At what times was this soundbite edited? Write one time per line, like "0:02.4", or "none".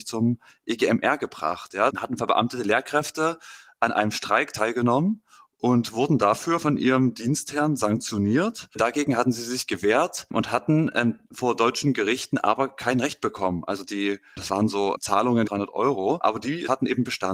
0:01.9
0:15.5